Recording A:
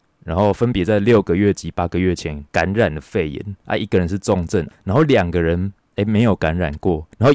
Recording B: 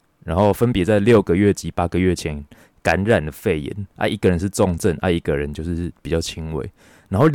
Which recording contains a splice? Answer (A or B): A